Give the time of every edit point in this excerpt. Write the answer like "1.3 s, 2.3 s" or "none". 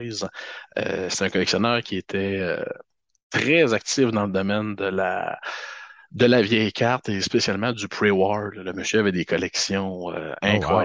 none